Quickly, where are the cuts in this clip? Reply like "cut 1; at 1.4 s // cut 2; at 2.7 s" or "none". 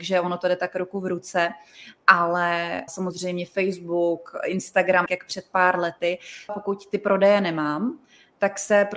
cut 1; at 2.9 s // cut 2; at 5.1 s // cut 3; at 6.5 s